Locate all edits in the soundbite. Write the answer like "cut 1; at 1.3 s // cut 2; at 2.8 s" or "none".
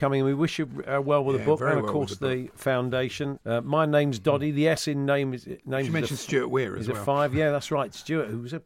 cut 1; at 3.4 s